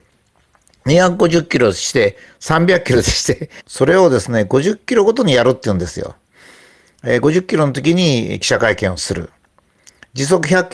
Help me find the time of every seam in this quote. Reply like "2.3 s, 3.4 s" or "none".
3.6 s